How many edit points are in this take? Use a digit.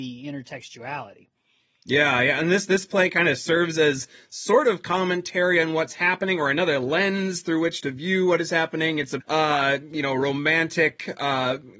1